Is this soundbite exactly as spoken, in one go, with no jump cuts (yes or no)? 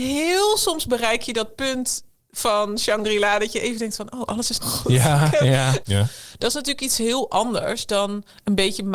no